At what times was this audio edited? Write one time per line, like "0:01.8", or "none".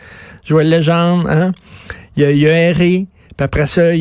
none